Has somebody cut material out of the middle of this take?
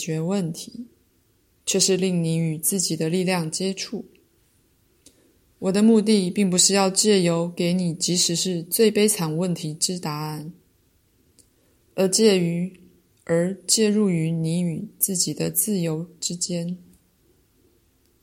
no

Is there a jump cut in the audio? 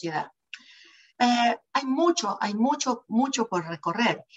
yes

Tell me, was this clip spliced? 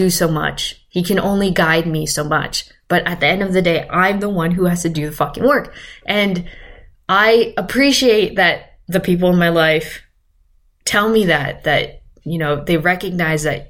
no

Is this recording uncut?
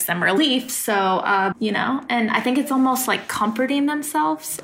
no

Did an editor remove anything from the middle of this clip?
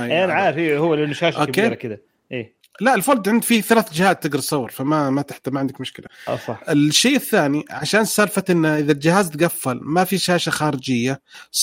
no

